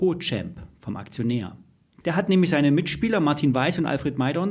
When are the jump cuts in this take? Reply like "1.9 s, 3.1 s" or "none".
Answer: 2.0 s